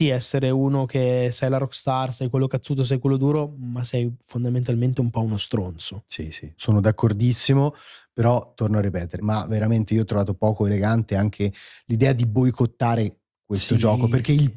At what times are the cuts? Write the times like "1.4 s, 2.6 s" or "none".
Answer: 6.6 s, 9.2 s